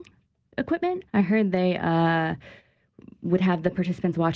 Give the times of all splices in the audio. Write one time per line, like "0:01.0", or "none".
0:01.1

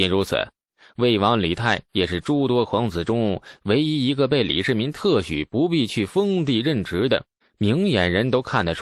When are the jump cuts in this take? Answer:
0:07.4

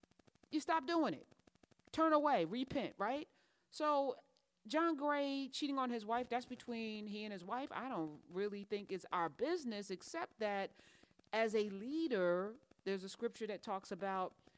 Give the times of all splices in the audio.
none

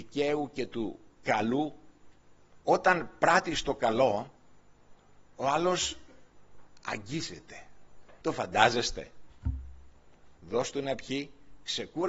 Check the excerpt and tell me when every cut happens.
0:02.6
0:08.2
0:10.4

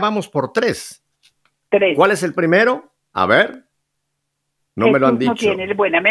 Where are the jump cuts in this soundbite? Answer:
none

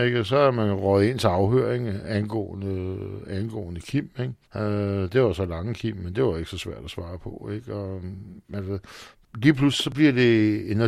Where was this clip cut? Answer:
0:04.4

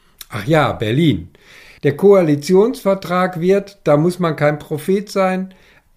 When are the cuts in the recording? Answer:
0:01.8

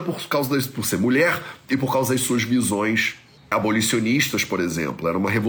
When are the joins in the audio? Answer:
0:03.5

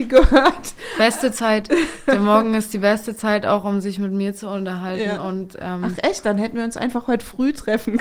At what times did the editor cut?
none

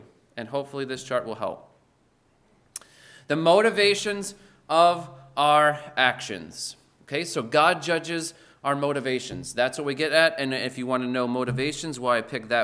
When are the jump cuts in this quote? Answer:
none

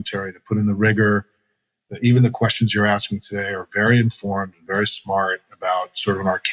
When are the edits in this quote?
none

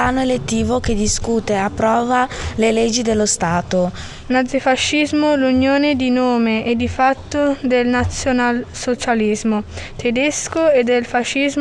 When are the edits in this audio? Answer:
0:04.2

